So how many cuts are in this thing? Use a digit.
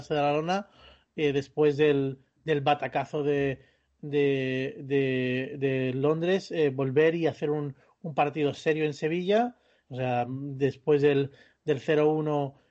1